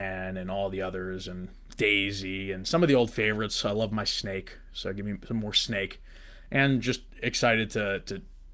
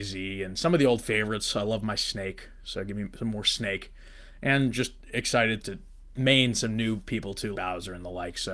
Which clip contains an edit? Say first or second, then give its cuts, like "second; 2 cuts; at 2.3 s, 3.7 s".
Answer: second; 2 cuts; at 5.6 s, 7.5 s